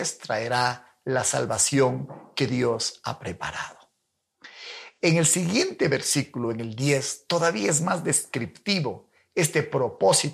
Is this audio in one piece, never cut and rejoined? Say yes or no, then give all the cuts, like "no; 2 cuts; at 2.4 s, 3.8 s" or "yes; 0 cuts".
yes; 0 cuts